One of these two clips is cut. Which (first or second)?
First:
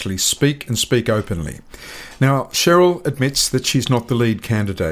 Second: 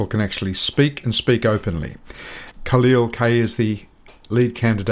second